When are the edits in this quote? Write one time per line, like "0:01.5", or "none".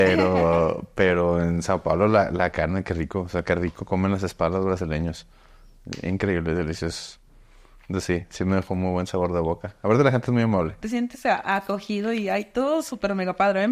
0:10.8